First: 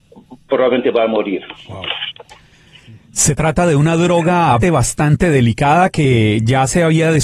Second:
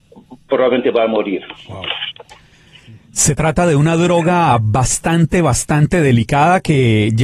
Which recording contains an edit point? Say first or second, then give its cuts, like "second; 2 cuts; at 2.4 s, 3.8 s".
first; 1 cut; at 4.6 s